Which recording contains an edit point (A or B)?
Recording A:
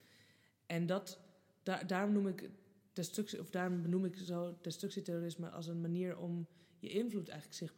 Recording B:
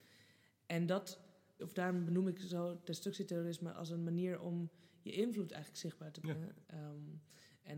B